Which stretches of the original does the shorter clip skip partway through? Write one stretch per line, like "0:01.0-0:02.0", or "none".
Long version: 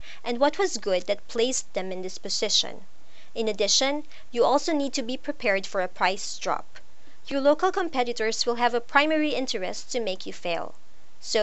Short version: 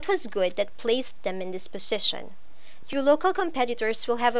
0:03.3-0:07.2